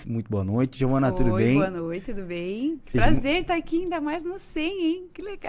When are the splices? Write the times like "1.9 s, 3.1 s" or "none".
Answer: none